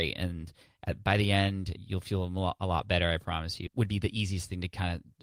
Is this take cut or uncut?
cut